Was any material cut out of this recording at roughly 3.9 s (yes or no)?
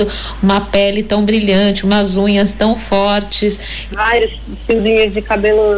yes